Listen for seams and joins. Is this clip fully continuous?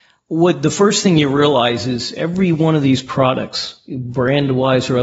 yes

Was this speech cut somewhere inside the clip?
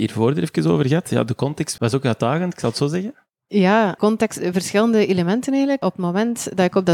no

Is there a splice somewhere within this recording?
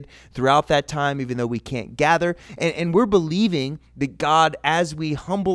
no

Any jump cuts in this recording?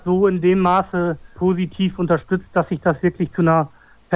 no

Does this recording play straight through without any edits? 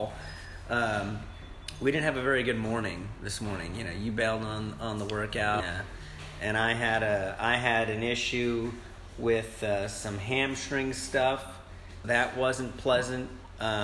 no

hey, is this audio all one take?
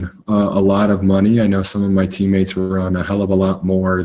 yes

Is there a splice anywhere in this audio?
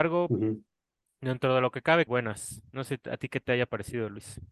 yes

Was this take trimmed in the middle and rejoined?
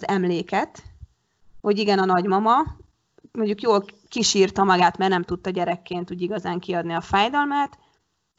no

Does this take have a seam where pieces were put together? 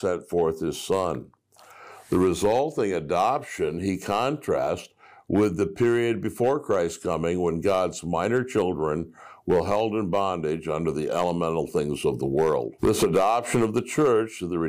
yes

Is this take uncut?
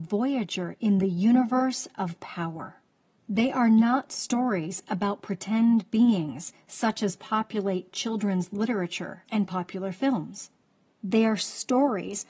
no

